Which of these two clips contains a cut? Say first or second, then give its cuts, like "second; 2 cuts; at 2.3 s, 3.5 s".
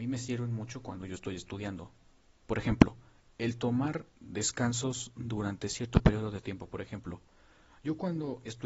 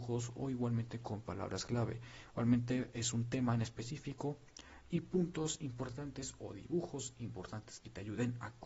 first; 1 cut; at 4.1 s